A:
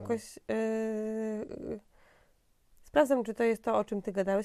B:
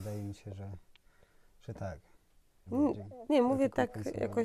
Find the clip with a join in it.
B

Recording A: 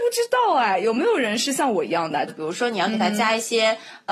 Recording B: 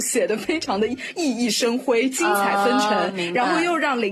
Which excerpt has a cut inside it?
A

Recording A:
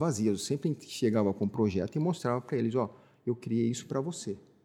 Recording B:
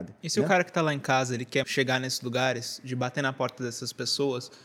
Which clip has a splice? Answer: B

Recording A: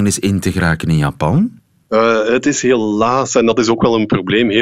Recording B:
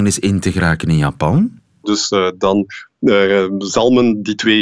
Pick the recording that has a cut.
B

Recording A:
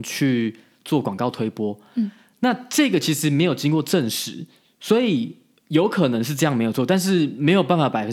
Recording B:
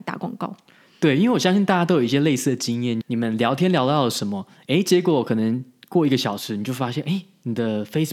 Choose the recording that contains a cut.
B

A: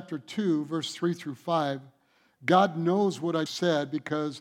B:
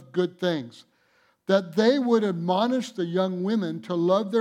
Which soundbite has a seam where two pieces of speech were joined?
A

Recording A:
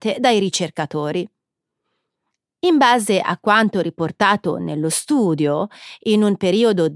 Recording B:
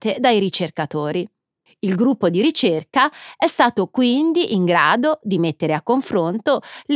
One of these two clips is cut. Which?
B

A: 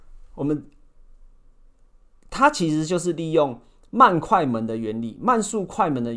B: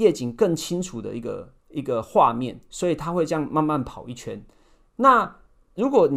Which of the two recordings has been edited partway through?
B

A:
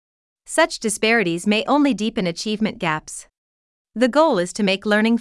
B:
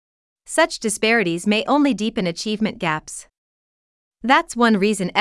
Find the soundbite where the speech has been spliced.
A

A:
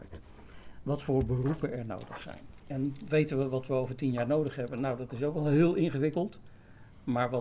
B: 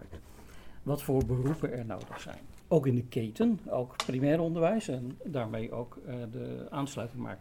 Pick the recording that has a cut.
B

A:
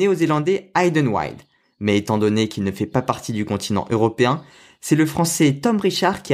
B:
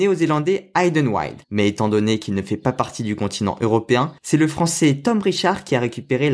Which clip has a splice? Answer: B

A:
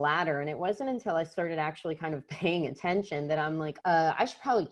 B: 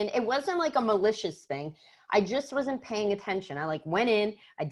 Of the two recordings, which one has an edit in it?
A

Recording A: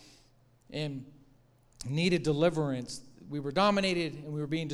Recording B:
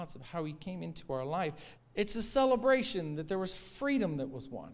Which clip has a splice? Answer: B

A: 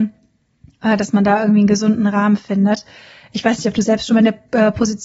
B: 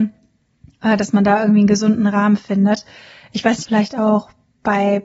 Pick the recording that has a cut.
B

